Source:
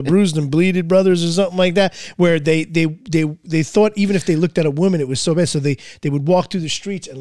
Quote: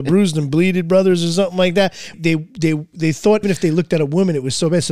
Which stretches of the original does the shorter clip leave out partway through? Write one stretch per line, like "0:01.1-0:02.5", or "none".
0:02.1-0:02.6
0:03.9-0:04.1